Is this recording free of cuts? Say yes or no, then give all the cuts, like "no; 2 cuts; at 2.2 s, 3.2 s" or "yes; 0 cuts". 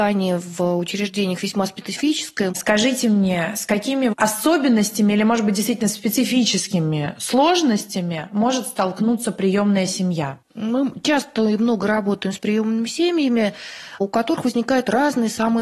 no; 1 cut; at 2.5 s